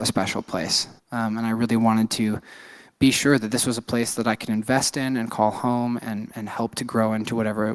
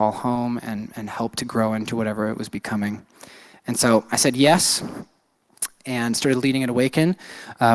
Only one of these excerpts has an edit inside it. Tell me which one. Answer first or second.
first